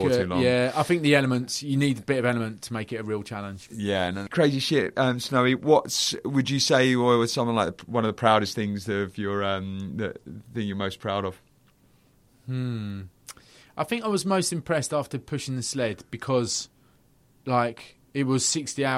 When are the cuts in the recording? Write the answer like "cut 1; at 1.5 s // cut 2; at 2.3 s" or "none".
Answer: cut 1; at 4.3 s